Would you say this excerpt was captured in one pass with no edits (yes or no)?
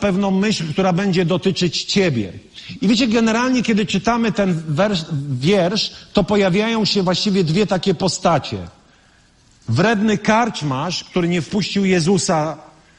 yes